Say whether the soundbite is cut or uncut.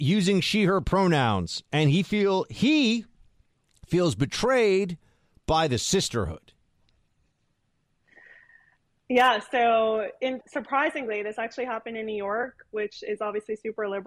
cut